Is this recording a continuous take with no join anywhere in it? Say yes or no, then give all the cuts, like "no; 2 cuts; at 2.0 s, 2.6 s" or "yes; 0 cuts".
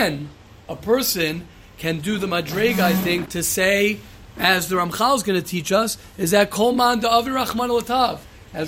no; 1 cut; at 3.2 s